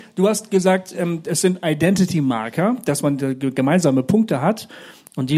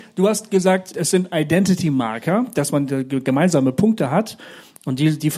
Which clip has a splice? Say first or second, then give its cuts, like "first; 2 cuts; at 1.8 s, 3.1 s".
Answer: second; 1 cut; at 0.9 s